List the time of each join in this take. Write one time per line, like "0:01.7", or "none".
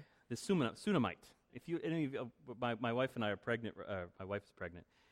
0:01.5